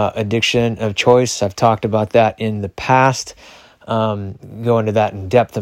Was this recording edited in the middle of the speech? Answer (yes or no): no